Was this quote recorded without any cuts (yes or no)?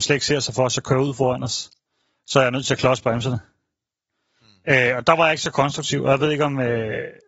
yes